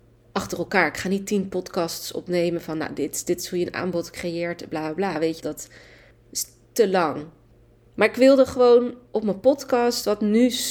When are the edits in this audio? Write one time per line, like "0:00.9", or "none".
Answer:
0:05.4